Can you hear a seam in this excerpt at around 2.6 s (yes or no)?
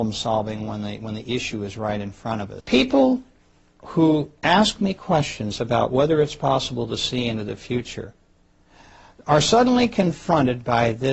yes